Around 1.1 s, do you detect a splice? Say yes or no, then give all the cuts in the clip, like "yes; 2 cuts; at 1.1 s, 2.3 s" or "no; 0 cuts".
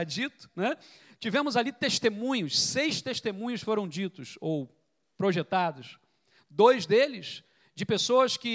no; 0 cuts